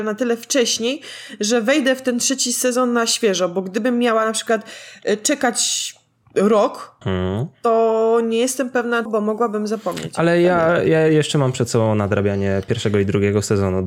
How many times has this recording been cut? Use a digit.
2